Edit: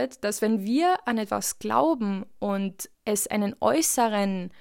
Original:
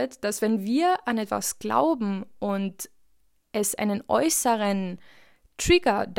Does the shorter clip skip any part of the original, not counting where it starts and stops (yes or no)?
yes